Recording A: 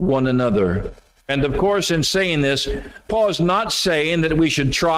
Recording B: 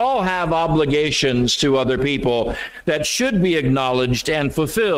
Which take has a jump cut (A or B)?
A